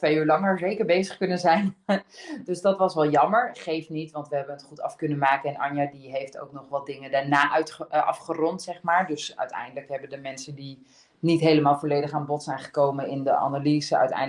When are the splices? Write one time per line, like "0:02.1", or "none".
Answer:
none